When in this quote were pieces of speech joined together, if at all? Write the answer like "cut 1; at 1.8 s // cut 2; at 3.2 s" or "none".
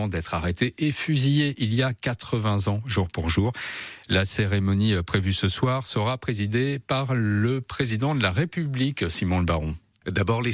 none